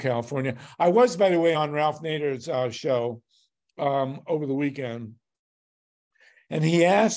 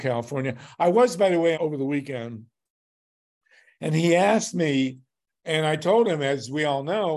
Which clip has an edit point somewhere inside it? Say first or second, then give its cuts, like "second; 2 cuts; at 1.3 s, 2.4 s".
second; 2 cuts; at 1.5 s, 5.4 s